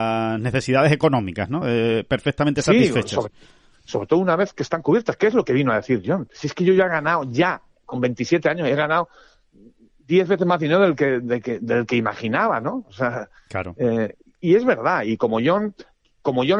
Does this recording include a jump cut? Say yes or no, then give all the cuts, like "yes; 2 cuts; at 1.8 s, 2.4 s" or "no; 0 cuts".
no; 0 cuts